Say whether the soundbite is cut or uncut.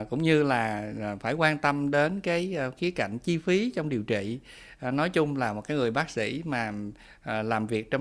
uncut